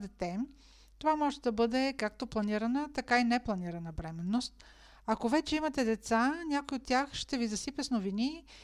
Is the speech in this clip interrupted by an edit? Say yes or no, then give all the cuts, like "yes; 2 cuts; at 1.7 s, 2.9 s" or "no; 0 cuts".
no; 0 cuts